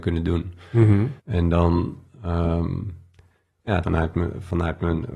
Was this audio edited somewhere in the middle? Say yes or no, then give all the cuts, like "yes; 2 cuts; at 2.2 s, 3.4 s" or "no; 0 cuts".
yes; 2 cuts; at 1.2 s, 3.8 s